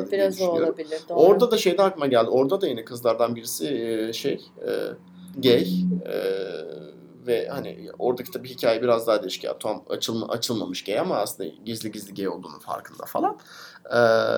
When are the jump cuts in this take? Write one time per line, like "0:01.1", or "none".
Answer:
0:05.3